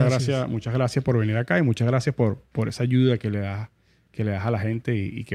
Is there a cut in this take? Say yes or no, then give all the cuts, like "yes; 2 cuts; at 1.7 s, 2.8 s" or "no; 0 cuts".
no; 0 cuts